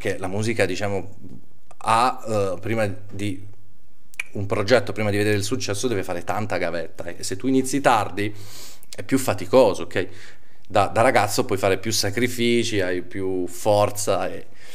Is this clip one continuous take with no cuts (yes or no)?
yes